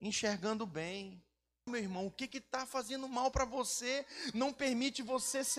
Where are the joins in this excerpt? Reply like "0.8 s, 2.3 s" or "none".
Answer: 1.7 s